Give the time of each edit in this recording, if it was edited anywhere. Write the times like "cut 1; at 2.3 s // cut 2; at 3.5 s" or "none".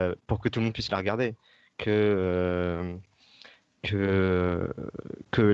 none